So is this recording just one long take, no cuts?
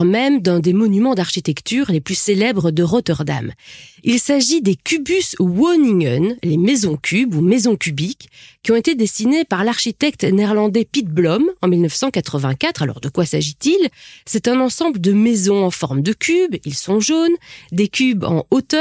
yes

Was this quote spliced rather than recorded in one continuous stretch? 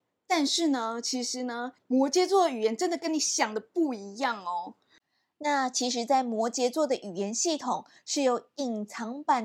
yes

